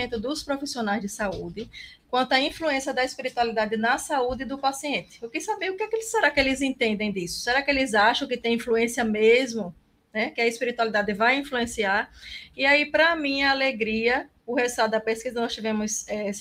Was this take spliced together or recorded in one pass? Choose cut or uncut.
cut